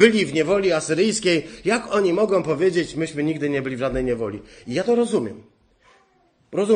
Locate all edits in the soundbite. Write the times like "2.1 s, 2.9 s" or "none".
none